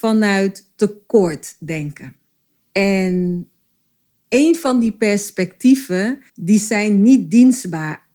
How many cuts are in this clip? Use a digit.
2